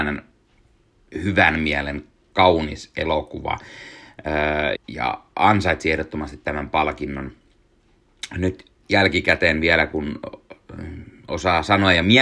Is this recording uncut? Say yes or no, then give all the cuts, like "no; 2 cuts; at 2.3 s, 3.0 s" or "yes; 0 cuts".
no; 1 cut; at 4.7 s